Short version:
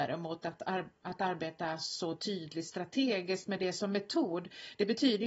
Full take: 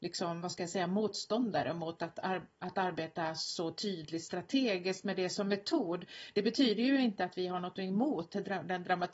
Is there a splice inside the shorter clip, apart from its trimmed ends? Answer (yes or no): no